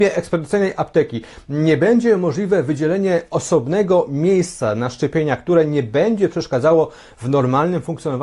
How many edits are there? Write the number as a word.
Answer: zero